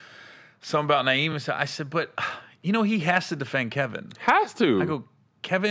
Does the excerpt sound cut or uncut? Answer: uncut